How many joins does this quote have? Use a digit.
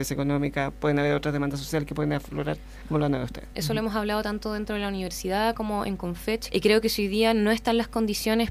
2